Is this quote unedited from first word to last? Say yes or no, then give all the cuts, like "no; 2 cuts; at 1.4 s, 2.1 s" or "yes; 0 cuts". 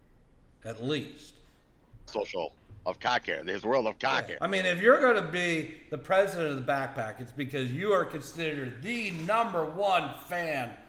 no; 2 cuts; at 2.1 s, 4.4 s